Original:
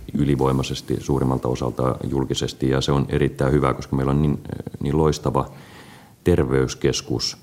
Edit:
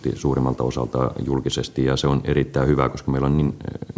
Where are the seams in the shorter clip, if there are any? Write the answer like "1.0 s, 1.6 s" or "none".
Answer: none